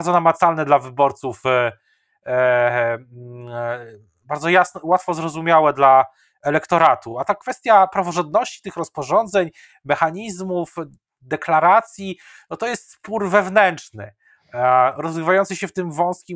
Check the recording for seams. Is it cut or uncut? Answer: uncut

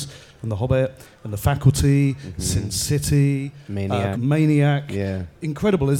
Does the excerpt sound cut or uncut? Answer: cut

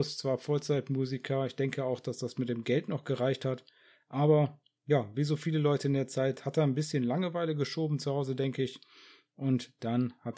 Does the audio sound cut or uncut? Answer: uncut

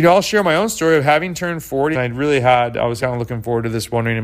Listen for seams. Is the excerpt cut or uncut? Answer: cut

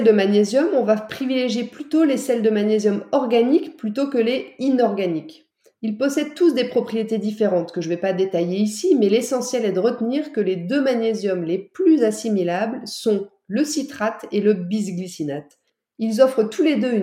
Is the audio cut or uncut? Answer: uncut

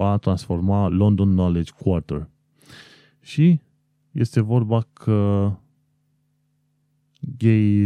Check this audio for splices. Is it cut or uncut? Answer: uncut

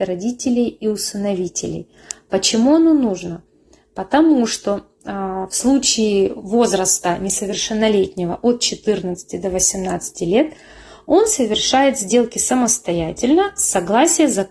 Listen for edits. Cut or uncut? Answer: uncut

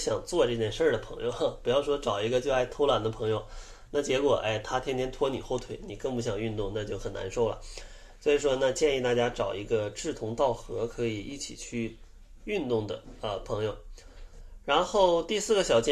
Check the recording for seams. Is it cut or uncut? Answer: uncut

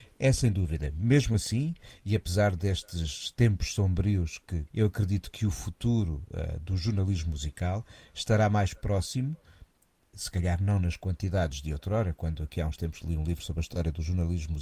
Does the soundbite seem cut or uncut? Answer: cut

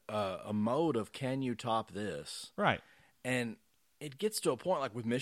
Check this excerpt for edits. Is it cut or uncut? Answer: uncut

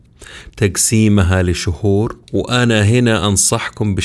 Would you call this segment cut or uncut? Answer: cut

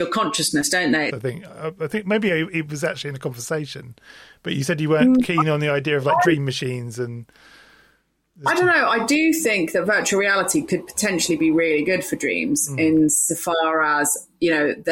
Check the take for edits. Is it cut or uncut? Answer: cut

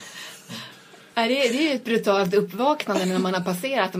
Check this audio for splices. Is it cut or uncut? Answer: uncut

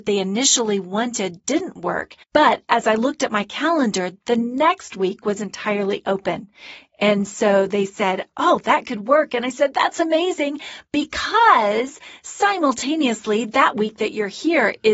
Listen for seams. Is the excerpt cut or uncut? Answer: cut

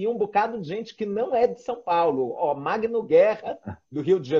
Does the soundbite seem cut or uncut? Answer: uncut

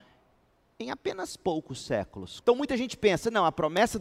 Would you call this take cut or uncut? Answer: cut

